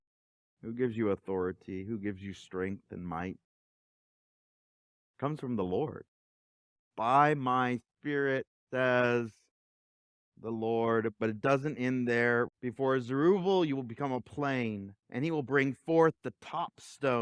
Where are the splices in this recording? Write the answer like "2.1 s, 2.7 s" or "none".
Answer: 12.5 s, 15.0 s